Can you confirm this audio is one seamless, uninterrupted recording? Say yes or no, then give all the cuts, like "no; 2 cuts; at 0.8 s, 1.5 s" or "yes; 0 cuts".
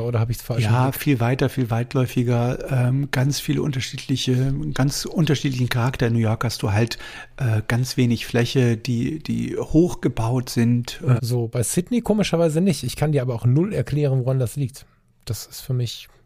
no; 1 cut; at 11.2 s